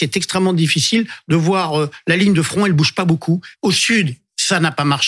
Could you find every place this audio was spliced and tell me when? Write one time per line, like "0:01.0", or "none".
0:03.5